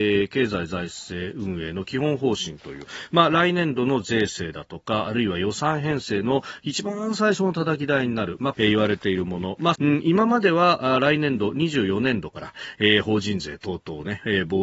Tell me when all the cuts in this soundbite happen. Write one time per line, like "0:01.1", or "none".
0:08.5
0:09.8